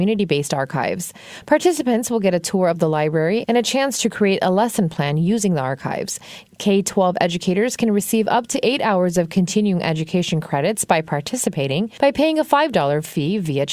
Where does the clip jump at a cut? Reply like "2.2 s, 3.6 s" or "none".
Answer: none